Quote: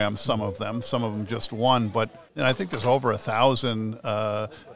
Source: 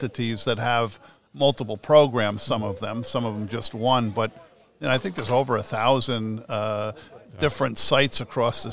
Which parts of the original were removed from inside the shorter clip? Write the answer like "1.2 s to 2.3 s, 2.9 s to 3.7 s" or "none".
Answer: 4.5 s to 4.7 s